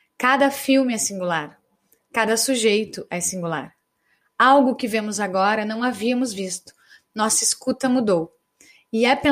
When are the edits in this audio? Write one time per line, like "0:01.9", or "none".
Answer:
0:04.2